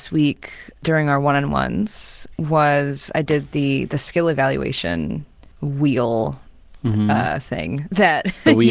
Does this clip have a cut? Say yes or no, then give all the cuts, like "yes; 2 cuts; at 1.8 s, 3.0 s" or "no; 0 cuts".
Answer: no; 0 cuts